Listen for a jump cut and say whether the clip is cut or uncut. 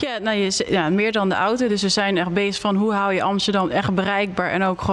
uncut